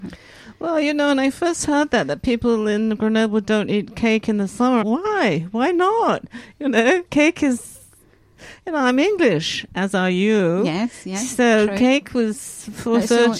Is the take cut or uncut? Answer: cut